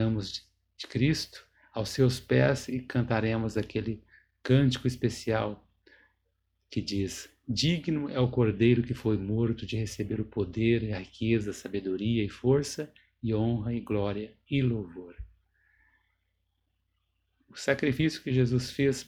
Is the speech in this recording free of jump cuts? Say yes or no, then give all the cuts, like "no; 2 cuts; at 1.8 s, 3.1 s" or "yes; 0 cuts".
yes; 0 cuts